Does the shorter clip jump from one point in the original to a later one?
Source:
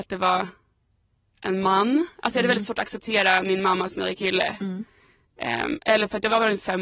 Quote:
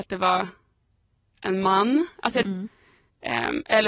yes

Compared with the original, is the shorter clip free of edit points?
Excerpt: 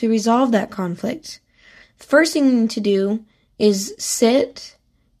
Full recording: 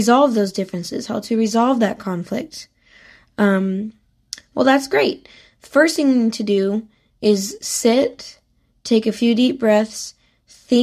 no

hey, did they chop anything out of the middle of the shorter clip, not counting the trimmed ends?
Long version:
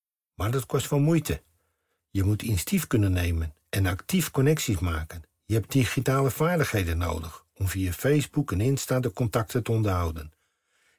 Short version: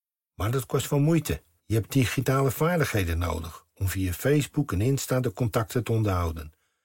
yes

